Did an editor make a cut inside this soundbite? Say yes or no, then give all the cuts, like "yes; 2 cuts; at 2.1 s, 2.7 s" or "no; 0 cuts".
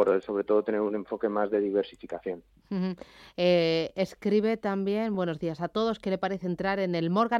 no; 0 cuts